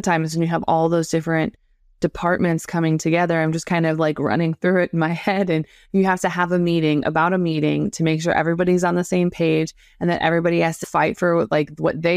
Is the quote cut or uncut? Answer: cut